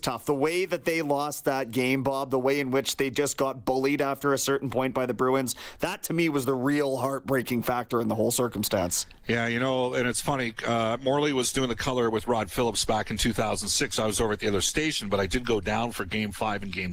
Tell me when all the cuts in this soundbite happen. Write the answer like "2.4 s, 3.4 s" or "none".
none